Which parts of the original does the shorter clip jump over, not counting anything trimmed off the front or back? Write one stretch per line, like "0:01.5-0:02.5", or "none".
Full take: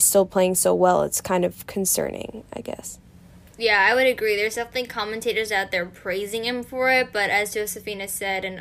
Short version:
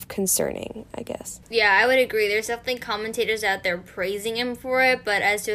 0:03.0-0:03.5